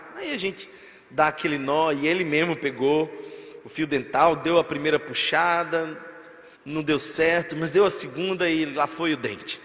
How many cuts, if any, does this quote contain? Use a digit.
1